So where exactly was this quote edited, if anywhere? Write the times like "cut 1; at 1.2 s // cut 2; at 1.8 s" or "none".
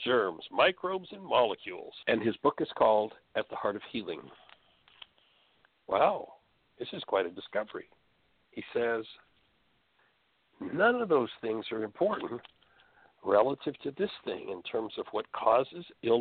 cut 1; at 2.0 s // cut 2; at 5.7 s